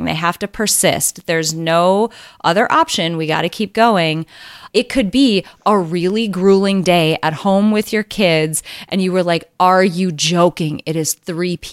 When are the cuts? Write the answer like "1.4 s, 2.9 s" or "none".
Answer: 4.7 s